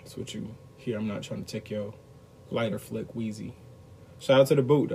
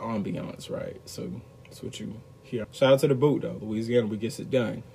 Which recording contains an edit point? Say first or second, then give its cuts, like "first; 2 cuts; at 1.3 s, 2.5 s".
second; 1 cut; at 2.6 s